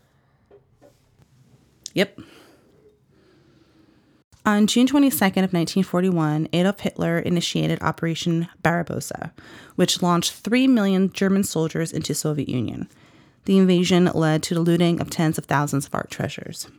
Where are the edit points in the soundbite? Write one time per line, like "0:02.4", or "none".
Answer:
none